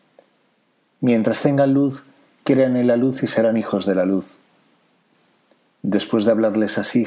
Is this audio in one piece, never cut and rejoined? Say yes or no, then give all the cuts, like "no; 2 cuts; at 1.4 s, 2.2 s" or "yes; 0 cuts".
yes; 0 cuts